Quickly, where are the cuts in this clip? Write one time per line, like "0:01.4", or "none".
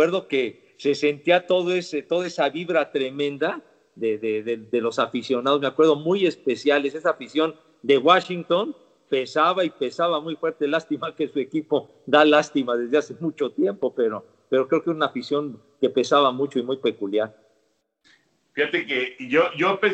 none